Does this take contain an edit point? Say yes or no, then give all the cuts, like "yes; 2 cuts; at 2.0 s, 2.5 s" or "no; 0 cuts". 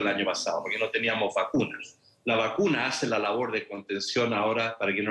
no; 0 cuts